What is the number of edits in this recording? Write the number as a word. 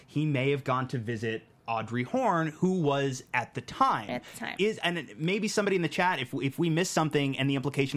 one